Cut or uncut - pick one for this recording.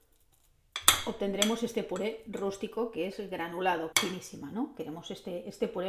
cut